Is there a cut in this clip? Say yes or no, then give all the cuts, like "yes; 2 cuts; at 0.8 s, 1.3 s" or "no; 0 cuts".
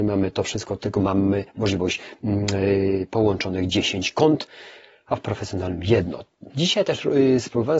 no; 0 cuts